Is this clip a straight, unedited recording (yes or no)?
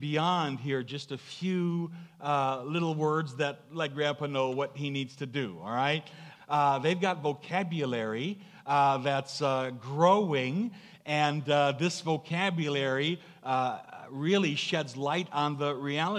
no